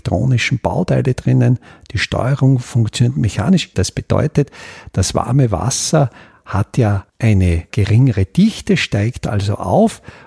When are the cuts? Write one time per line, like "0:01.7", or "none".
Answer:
0:03.7
0:07.1